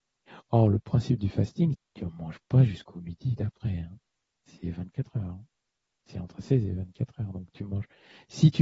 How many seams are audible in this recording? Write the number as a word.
one